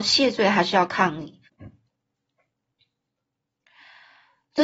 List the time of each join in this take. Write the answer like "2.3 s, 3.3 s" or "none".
1.5 s